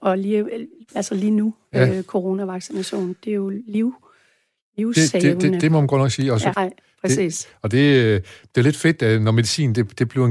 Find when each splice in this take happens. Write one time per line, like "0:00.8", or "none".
0:06.5